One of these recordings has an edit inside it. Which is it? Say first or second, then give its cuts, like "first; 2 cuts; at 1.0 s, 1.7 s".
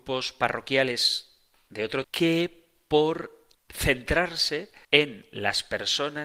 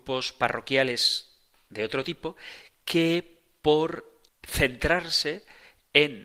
first; 2 cuts; at 2.0 s, 4.8 s